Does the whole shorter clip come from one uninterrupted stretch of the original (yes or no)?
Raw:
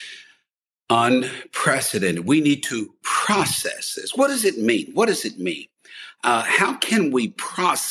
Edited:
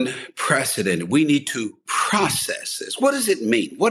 yes